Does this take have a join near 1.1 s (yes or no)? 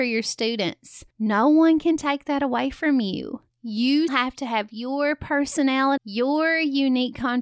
no